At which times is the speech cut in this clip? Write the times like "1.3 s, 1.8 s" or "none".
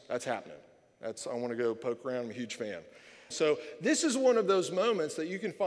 3.3 s